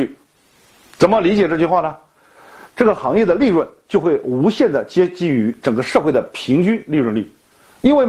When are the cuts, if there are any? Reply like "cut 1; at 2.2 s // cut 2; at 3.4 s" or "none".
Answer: cut 1; at 2.7 s